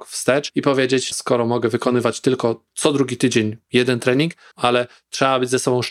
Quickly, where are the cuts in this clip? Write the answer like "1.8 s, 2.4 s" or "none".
1.1 s, 4.5 s